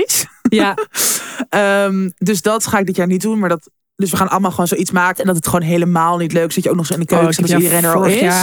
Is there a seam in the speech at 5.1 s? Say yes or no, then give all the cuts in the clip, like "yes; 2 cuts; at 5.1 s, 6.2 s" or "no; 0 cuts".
yes; 1 cut; at 5.1 s